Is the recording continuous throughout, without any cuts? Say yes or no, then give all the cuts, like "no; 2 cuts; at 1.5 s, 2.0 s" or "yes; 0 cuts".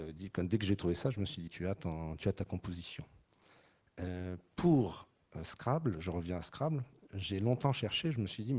no; 1 cut; at 1.5 s